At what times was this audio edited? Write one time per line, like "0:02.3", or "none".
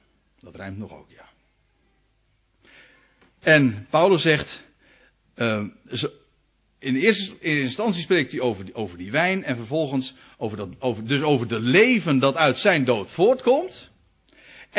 none